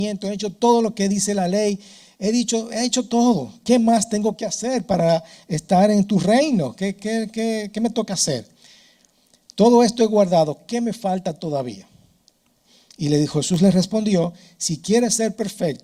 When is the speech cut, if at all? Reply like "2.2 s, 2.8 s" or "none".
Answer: none